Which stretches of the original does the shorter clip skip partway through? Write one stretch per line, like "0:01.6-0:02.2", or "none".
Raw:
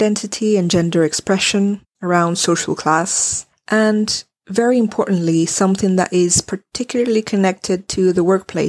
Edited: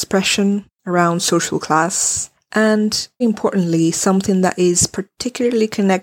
0:04.4-0:04.7